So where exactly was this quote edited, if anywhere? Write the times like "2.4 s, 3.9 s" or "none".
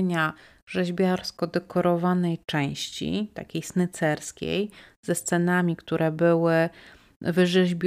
none